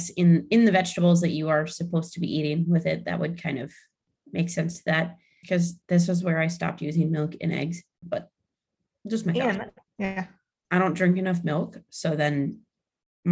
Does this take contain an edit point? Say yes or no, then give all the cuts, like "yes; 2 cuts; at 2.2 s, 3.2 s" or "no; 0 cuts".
yes; 3 cuts; at 5.4 s, 8.0 s, 9.9 s